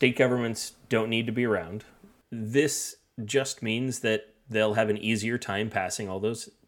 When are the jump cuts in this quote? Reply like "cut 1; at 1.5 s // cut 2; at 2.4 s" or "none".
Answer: cut 1; at 2.2 s